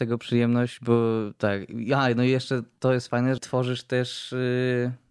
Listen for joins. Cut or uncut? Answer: cut